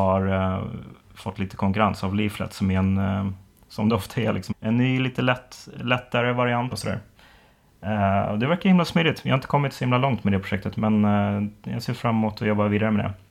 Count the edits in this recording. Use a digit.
2